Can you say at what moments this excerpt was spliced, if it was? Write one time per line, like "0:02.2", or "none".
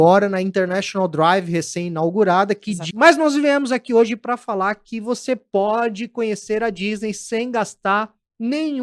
0:02.9